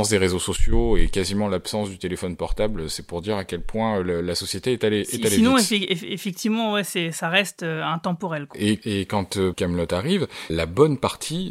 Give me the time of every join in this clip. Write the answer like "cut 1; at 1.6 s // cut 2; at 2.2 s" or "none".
cut 1; at 8.5 s // cut 2; at 10.5 s